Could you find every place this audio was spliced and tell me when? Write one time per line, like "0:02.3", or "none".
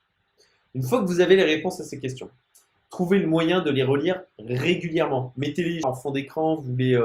0:05.8